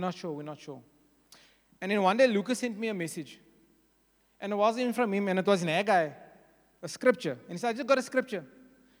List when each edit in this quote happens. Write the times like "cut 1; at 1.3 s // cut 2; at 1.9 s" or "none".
none